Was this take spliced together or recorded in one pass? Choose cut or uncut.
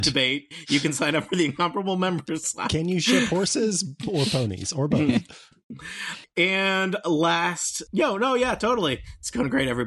cut